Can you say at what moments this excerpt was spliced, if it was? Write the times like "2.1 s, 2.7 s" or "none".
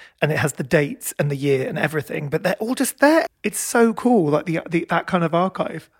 3.3 s